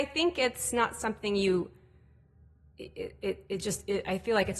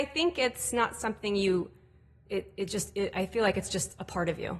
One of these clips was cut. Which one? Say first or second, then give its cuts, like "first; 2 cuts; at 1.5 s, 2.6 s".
second; 1 cut; at 2.3 s